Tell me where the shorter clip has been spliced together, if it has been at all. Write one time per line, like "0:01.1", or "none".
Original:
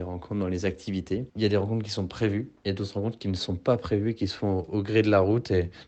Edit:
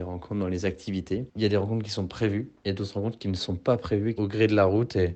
0:04.2